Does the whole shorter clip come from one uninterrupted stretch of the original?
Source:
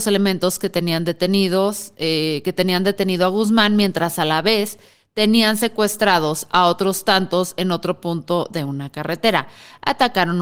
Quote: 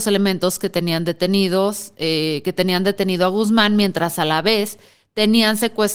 yes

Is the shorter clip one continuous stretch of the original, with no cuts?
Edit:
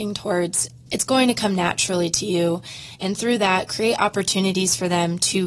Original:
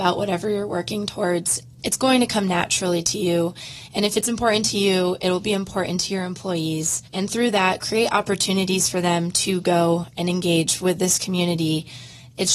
no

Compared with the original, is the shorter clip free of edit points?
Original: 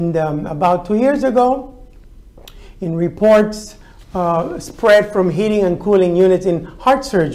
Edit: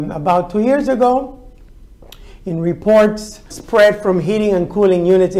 no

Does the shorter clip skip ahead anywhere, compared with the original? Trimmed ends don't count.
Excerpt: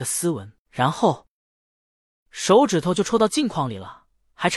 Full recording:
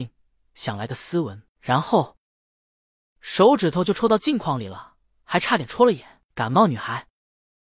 no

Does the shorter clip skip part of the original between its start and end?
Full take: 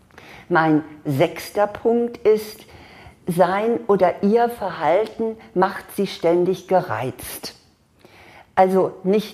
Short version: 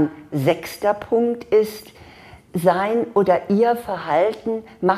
no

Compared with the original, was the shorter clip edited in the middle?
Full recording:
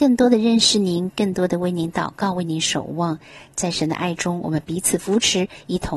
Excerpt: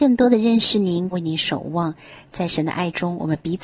yes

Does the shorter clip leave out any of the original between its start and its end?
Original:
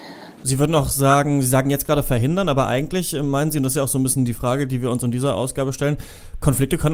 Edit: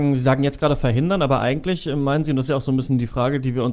no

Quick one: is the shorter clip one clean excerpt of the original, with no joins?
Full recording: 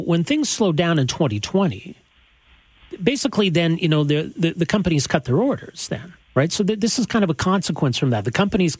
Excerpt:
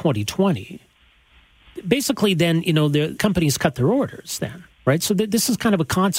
no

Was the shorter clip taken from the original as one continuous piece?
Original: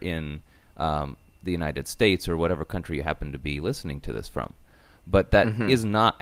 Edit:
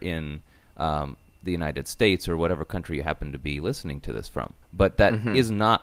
no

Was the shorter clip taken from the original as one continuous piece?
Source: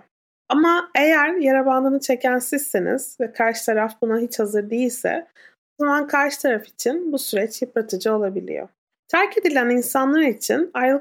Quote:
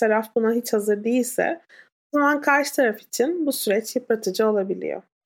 yes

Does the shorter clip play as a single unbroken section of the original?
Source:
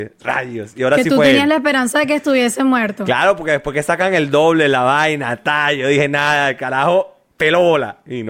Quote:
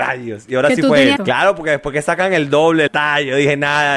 no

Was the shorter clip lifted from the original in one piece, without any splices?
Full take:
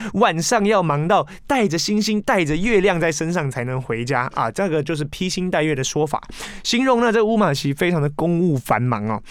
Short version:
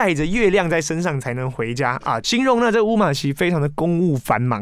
no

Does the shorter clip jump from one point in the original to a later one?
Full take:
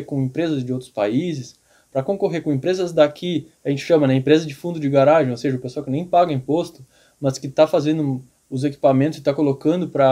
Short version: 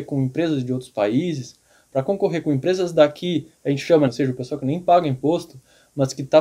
yes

